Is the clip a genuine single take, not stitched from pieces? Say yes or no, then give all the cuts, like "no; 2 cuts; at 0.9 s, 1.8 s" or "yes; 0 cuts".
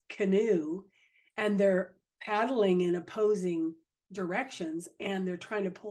yes; 0 cuts